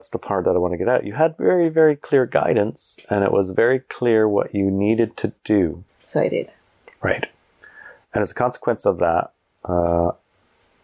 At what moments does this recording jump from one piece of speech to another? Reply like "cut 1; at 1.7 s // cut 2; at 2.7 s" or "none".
cut 1; at 5.9 s

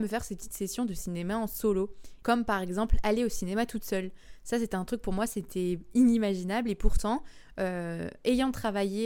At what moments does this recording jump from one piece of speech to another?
cut 1; at 2.2 s

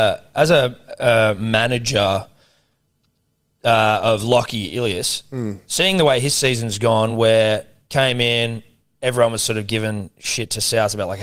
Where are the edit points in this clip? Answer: none

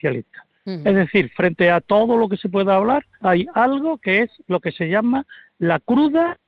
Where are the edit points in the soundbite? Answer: cut 1; at 3.1 s

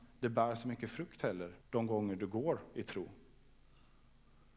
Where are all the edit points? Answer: cut 1; at 1.6 s

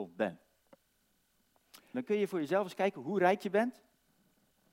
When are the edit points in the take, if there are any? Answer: cut 1; at 1.9 s

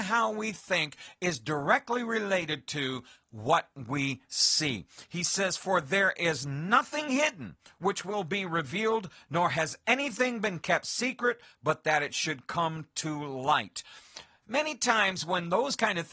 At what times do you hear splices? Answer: cut 1; at 14.4 s

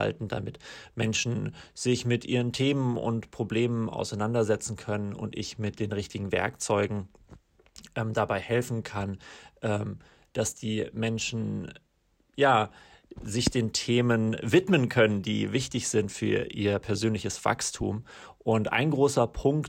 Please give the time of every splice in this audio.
none

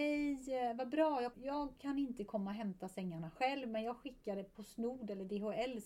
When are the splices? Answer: cut 1; at 1.3 s // cut 2; at 4.5 s

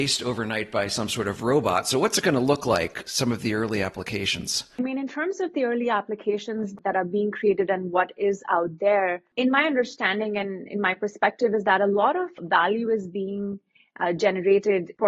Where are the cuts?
none

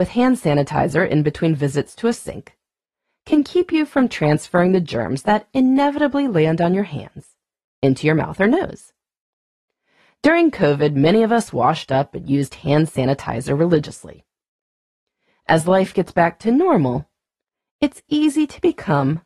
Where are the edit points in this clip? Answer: none

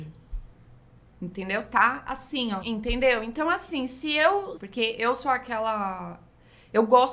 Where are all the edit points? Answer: cut 1; at 2.6 s // cut 2; at 4.6 s

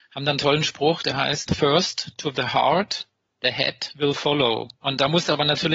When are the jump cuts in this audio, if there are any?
none

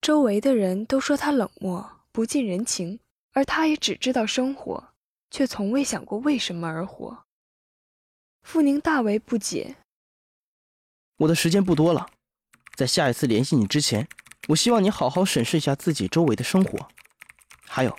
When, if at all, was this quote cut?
none

